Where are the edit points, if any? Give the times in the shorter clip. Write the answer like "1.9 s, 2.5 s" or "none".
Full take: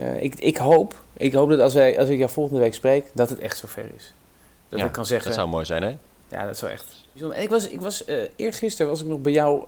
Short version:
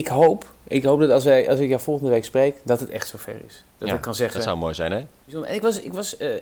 3.7 s, 5.2 s